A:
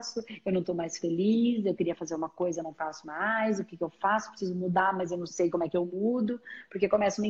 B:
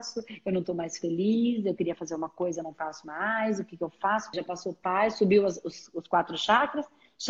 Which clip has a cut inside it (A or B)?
B